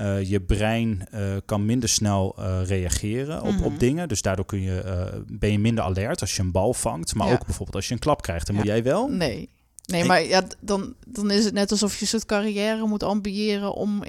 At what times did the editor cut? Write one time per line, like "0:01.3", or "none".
0:08.6